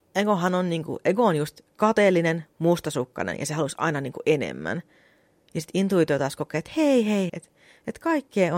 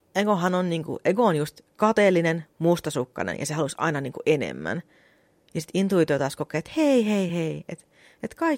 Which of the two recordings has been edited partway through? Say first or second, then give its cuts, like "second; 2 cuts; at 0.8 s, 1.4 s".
first; 1 cut; at 7.3 s